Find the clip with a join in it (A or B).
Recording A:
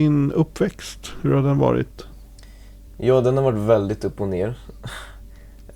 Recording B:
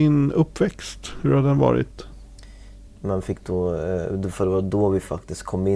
B